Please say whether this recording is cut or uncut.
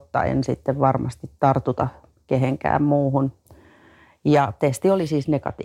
uncut